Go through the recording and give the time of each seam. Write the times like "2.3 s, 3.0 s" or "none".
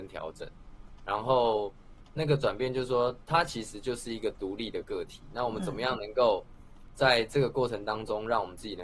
none